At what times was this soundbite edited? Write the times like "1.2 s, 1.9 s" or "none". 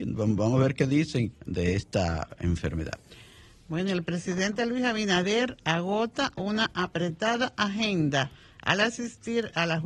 1.3 s